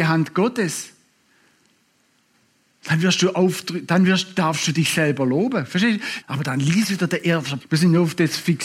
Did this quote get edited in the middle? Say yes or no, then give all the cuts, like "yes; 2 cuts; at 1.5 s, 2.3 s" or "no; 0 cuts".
yes; 2 cuts; at 6.2 s, 7.6 s